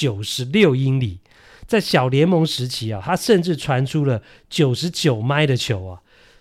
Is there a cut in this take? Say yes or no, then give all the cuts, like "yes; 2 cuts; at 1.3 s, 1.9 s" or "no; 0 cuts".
no; 0 cuts